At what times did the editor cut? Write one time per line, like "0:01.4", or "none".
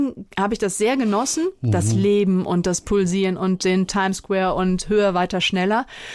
none